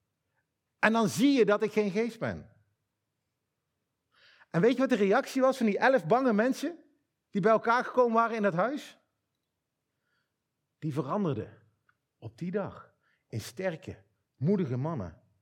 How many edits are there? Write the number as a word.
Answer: zero